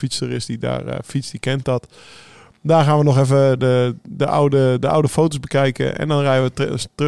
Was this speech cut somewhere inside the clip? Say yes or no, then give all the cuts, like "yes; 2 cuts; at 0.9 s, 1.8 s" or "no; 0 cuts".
no; 0 cuts